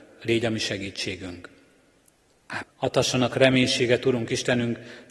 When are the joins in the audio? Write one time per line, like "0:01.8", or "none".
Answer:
0:02.6